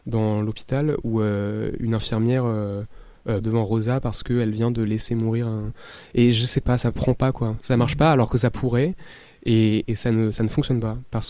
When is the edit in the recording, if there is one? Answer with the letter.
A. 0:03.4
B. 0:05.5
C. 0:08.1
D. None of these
A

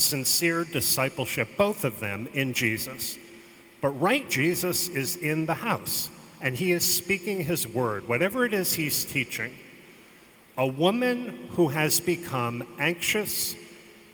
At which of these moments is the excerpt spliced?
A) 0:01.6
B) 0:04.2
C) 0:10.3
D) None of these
B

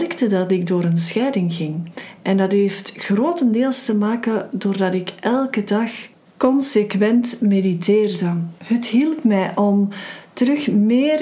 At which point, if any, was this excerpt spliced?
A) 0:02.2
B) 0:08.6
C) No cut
B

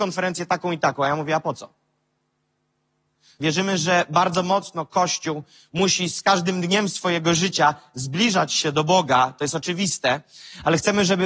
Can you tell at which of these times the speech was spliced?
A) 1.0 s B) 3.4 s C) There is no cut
B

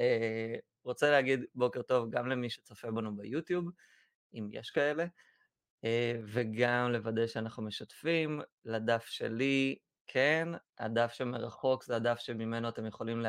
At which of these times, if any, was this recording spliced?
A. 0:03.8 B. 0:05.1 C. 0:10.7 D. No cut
D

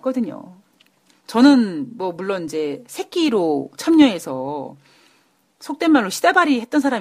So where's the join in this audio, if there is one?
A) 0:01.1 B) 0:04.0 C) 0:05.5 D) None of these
A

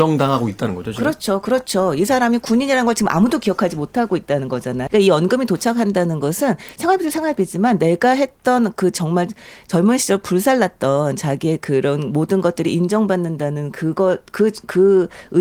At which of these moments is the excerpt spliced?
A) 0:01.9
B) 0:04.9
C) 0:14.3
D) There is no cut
B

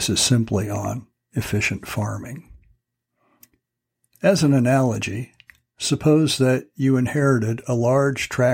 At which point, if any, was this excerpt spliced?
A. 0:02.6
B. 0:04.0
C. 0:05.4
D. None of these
D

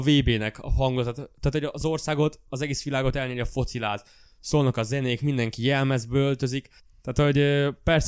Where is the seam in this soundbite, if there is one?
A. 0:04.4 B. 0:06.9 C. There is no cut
C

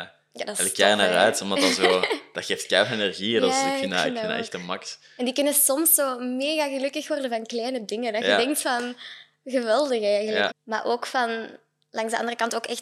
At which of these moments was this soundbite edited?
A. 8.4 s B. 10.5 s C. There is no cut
B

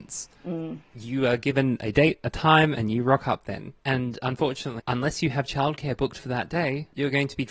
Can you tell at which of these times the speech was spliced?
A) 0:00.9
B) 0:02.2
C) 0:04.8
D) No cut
C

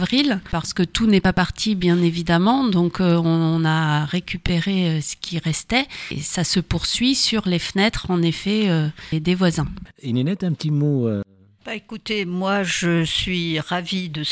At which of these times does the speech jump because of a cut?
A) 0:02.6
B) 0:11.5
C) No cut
C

